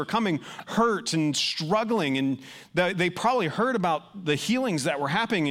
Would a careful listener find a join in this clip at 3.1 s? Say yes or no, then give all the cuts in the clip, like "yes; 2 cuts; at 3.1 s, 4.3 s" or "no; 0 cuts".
no; 0 cuts